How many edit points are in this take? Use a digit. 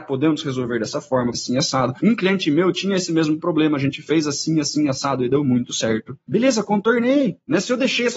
1